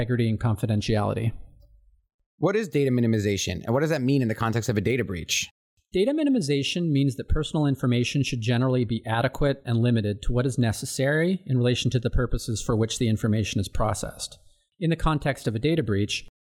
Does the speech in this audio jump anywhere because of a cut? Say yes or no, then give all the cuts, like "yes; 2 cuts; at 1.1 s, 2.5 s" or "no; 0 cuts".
yes; 2 cuts; at 9.6 s, 14.7 s